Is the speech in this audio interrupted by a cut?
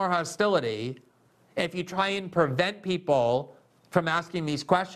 no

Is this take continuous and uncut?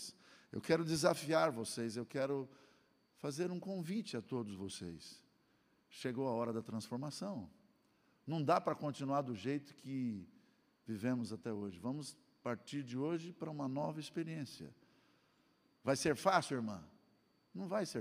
yes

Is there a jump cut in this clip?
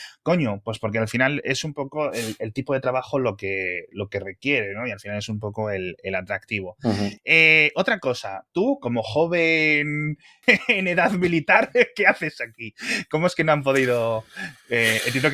yes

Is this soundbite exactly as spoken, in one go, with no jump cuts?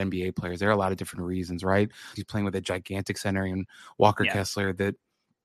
no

